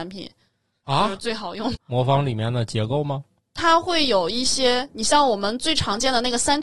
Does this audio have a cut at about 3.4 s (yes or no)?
no